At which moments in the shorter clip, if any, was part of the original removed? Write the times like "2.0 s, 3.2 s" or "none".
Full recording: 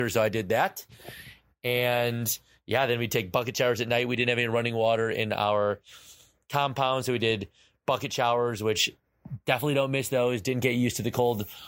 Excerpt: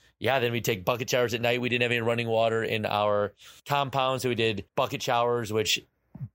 3.6 s, 4.7 s

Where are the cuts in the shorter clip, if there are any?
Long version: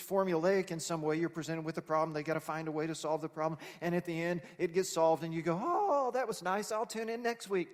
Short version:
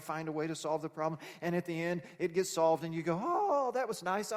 none

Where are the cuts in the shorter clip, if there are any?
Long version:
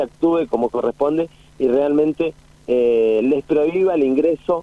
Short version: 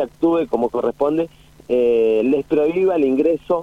1.6 s

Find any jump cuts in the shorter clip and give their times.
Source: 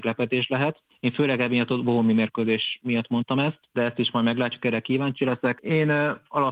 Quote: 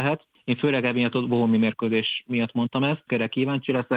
3.1 s

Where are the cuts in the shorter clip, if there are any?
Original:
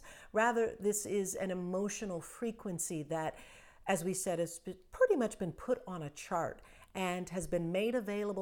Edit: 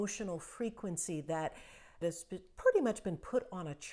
2.0 s

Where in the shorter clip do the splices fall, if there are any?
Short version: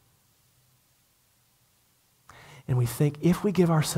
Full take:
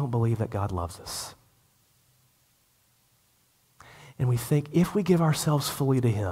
none

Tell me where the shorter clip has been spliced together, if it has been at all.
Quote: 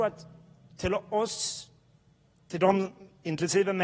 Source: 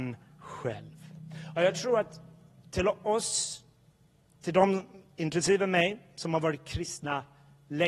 none

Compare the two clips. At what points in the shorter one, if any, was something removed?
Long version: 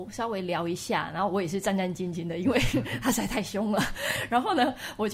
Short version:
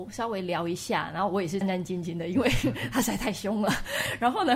1.6 s

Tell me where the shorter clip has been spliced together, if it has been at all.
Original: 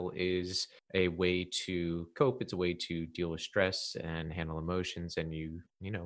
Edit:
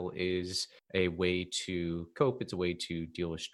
none

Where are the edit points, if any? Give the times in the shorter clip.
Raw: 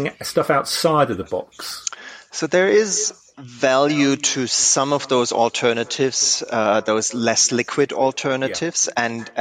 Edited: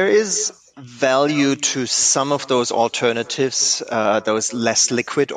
none

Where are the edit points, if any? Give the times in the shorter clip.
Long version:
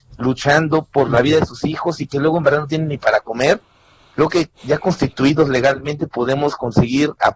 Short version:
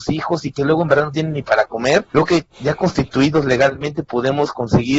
2.1 s

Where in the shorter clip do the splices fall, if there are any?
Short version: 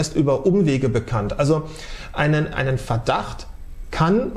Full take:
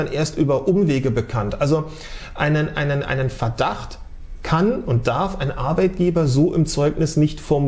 2.5 s

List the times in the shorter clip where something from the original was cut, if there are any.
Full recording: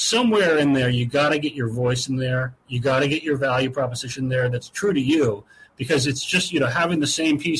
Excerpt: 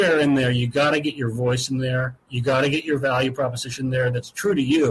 none

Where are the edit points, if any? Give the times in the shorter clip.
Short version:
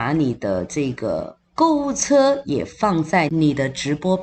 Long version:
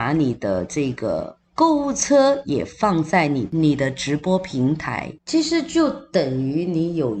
3.3 s

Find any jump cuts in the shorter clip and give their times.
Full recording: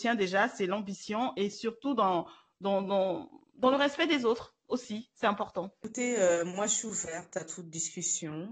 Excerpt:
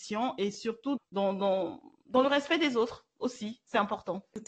1.0 s

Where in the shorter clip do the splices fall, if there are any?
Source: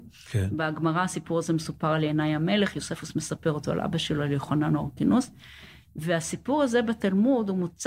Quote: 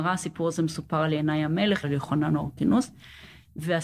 1.8 s

